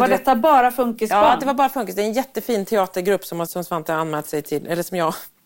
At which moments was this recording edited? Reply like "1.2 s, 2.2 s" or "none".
3.5 s